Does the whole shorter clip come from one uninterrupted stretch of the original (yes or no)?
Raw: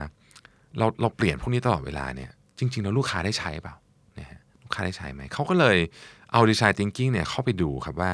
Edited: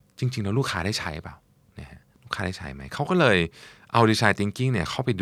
yes